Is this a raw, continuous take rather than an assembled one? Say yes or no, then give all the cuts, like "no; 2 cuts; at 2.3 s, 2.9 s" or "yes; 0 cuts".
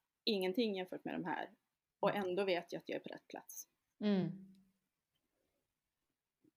yes; 0 cuts